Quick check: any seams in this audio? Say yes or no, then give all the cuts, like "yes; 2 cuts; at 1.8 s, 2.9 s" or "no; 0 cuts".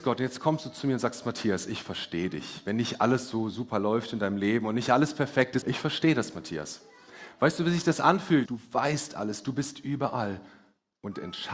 yes; 2 cuts; at 5.6 s, 8.5 s